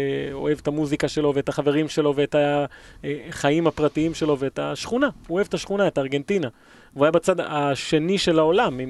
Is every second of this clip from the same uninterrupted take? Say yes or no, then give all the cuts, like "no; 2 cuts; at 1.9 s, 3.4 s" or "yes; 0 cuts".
yes; 0 cuts